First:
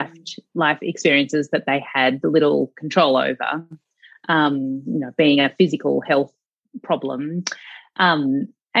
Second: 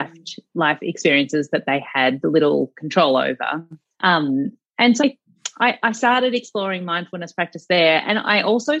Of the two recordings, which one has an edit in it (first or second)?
second